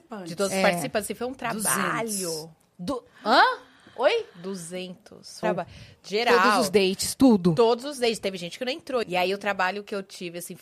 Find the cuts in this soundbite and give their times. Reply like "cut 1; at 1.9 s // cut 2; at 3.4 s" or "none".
cut 1; at 5.4 s // cut 2; at 9.0 s